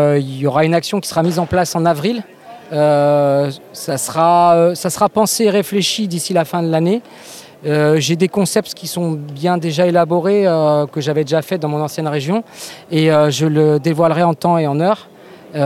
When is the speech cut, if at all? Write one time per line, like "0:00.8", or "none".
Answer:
none